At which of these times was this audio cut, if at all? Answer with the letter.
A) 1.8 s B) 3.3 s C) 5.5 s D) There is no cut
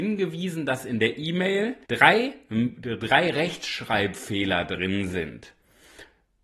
A